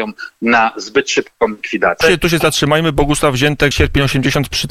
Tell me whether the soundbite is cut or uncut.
cut